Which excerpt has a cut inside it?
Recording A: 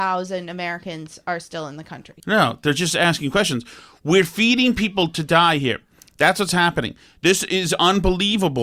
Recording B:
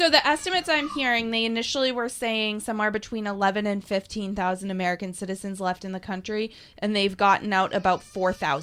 A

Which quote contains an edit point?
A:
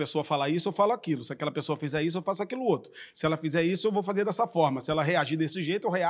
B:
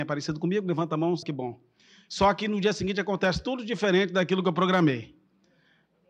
B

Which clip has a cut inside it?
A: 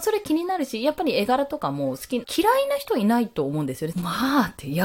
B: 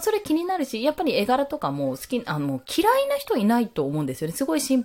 A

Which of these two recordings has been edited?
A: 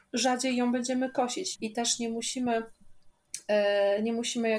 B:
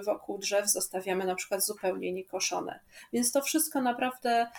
A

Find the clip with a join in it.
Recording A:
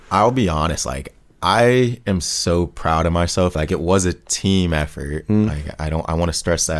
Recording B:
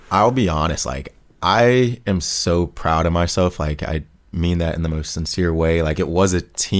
A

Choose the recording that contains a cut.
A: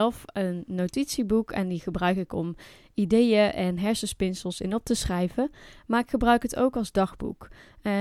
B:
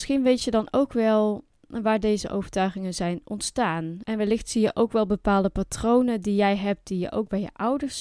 B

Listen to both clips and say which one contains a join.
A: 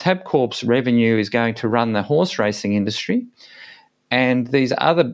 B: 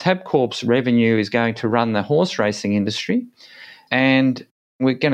B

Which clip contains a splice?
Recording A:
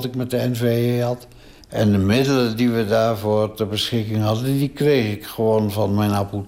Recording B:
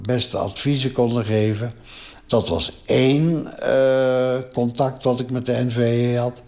A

